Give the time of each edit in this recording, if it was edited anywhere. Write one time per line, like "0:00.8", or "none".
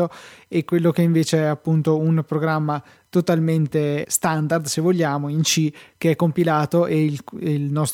0:04.0